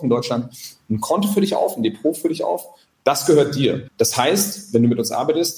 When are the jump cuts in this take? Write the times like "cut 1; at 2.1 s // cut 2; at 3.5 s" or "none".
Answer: cut 1; at 3.9 s

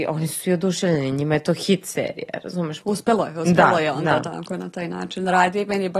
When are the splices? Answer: cut 1; at 2.8 s

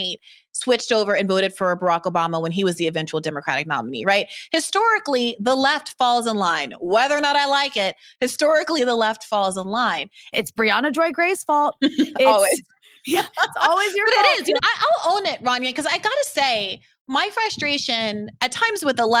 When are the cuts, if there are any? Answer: cut 1; at 10.3 s // cut 2; at 14.6 s

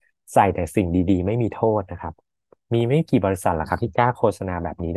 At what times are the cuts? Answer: none

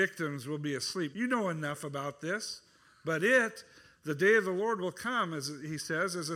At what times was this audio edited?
cut 1; at 1.1 s

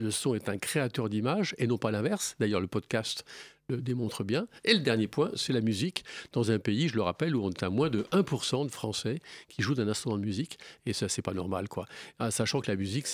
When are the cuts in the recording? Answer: none

